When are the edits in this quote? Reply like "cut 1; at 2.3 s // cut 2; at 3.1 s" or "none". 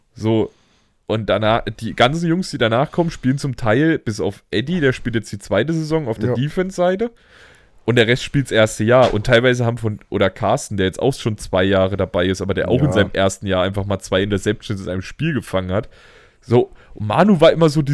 none